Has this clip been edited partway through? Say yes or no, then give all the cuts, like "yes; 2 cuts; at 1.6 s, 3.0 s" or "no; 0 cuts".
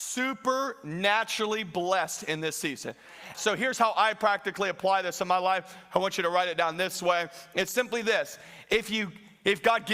yes; 1 cut; at 3.3 s